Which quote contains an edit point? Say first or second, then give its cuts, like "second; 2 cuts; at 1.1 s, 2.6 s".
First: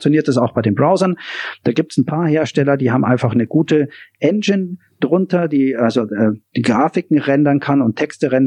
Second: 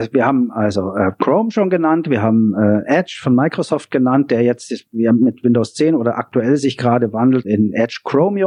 second; 1 cut; at 7.4 s